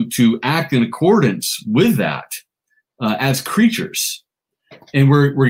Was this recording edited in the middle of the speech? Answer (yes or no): no